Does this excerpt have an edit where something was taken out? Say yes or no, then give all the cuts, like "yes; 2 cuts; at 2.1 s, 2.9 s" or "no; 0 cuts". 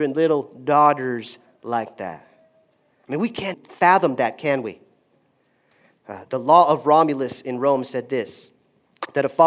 yes; 2 cuts; at 3.5 s, 6.0 s